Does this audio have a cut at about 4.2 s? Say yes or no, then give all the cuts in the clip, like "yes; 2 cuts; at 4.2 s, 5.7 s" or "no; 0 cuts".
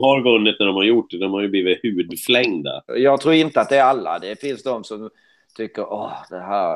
no; 1 cut; at 2.9 s